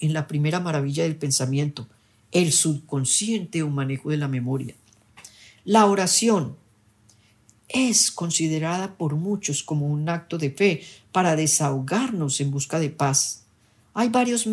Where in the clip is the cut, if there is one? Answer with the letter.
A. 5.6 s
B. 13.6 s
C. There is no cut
A